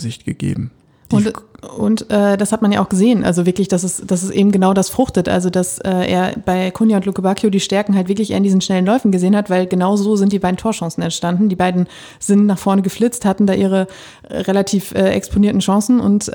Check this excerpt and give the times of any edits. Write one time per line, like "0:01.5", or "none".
none